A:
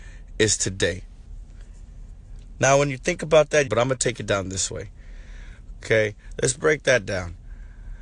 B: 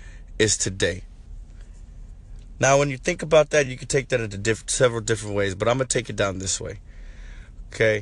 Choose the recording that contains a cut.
A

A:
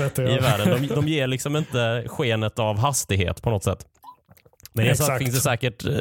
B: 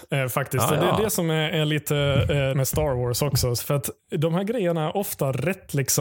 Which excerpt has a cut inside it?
B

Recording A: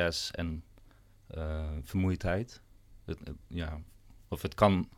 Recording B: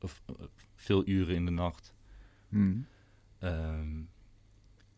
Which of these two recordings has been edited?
B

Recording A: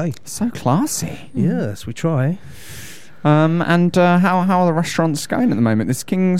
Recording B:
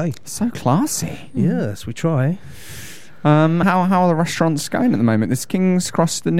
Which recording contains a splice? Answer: B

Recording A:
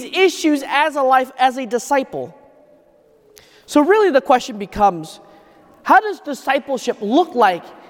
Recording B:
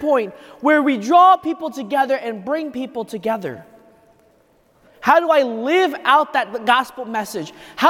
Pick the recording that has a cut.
B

